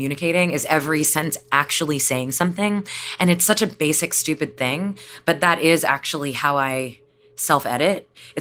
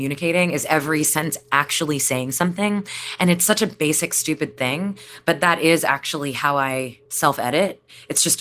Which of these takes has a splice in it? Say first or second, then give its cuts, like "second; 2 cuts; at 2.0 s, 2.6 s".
second; 1 cut; at 7.1 s